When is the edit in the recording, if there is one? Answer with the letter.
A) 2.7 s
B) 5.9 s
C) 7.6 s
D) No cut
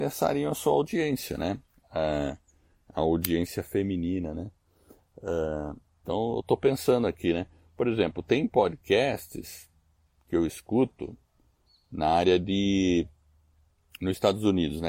B